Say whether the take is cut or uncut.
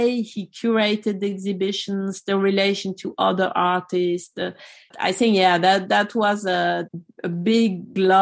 cut